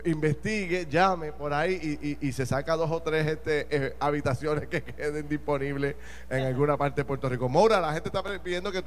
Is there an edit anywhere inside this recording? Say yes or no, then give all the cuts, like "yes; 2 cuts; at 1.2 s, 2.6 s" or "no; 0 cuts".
no; 0 cuts